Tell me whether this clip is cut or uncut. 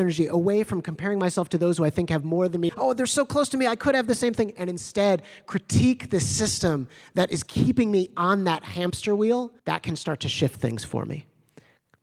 cut